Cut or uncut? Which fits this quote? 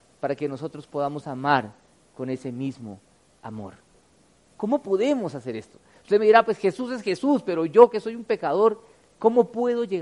cut